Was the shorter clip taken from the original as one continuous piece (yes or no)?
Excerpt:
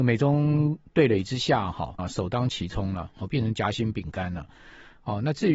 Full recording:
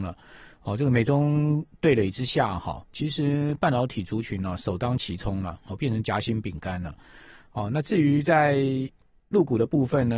no